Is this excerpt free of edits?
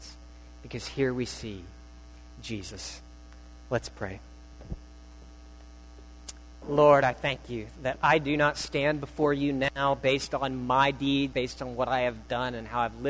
no; 2 cuts; at 6.6 s, 11.3 s

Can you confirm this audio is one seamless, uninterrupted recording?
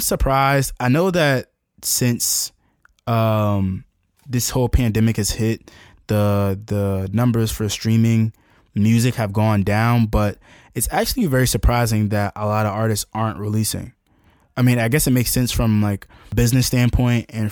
yes; 0 cuts

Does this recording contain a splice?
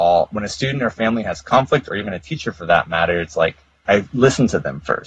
no; 0 cuts

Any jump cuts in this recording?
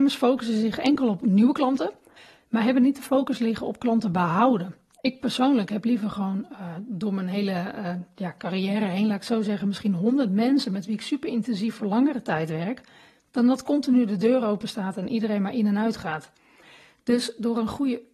no; 0 cuts

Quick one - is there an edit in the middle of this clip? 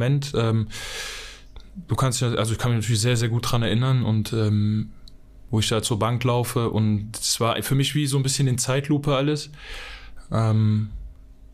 no; 0 cuts

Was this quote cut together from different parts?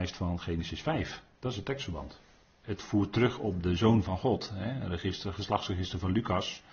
yes; 1 cut; at 2.6 s

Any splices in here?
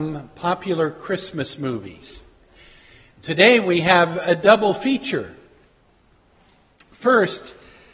no; 0 cuts

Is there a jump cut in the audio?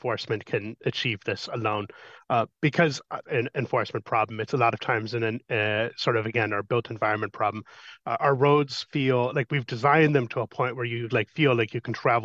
yes; 1 cut; at 3.2 s

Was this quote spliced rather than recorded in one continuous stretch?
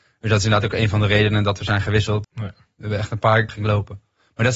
yes; 2 cuts; at 2.2 s, 3.5 s

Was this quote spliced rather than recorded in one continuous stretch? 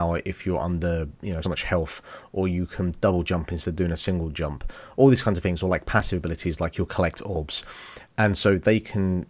yes; 1 cut; at 1.4 s

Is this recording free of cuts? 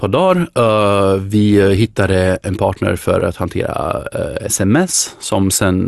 yes; 0 cuts

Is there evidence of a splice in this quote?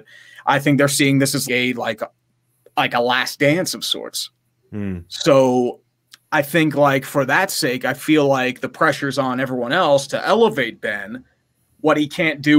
yes; 1 cut; at 1.4 s

